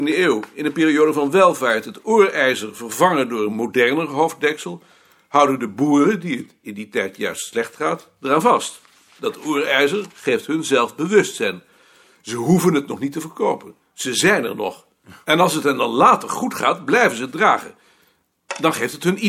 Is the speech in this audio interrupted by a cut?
no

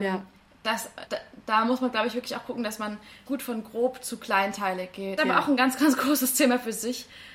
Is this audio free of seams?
no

